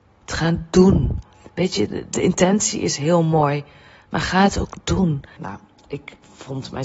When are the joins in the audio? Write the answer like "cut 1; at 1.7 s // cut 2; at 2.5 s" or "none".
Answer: cut 1; at 5.4 s